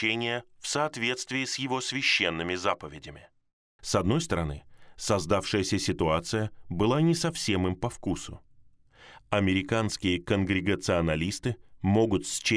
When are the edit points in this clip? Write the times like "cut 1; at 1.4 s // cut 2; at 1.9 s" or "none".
cut 1; at 3.8 s